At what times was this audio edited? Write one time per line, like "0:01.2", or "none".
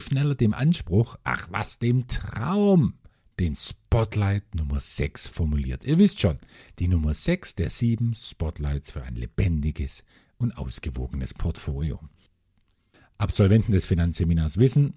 none